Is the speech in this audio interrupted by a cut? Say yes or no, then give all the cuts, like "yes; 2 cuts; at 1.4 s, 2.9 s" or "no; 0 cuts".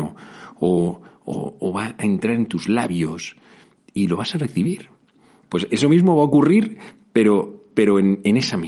yes; 1 cut; at 5.4 s